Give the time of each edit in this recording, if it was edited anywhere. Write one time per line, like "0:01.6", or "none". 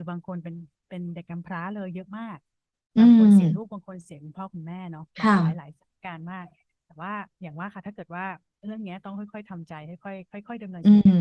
none